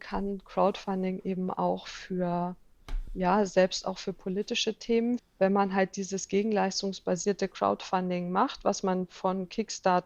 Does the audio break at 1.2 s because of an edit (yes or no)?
no